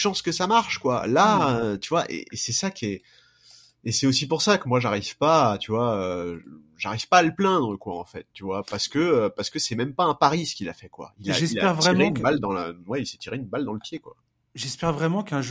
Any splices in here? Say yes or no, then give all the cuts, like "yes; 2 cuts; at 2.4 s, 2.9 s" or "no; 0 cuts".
no; 0 cuts